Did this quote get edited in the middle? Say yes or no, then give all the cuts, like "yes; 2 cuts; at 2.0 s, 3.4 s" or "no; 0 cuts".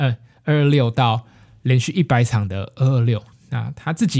no; 0 cuts